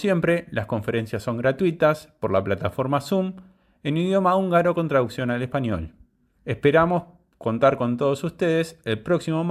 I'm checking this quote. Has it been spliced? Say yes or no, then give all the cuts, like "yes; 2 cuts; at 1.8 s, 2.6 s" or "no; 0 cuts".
yes; 1 cut; at 6.3 s